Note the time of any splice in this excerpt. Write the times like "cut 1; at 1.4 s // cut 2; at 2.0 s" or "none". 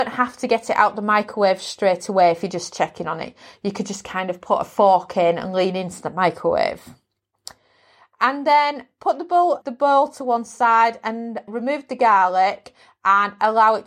cut 1; at 9.6 s // cut 2; at 11.5 s